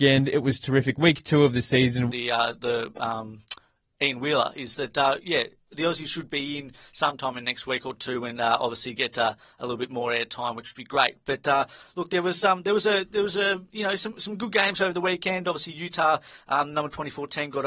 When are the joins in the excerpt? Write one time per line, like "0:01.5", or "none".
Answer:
0:02.1